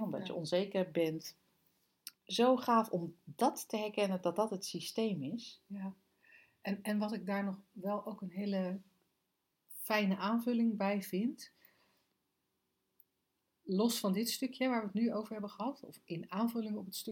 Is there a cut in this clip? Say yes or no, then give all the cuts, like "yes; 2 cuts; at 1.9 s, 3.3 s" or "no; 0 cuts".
yes; 1 cut; at 2.2 s